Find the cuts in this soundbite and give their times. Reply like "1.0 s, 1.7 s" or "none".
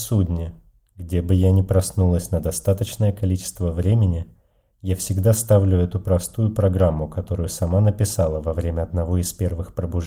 none

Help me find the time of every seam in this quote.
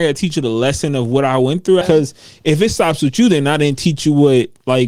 1.8 s

